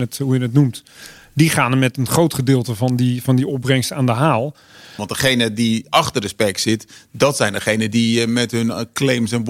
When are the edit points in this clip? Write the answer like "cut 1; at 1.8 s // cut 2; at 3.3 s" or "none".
cut 1; at 5.0 s